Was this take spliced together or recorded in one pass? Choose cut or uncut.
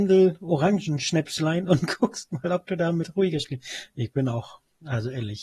uncut